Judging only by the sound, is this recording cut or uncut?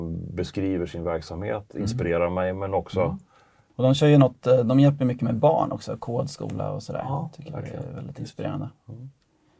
cut